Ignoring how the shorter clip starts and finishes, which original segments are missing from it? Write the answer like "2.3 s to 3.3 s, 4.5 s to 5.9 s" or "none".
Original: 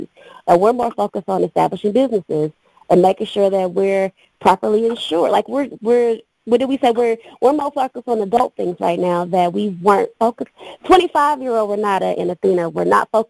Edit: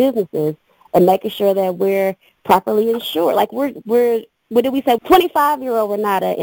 6.9 s to 10.8 s